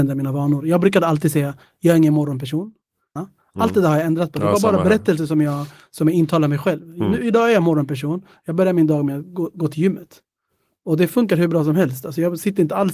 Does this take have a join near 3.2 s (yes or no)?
yes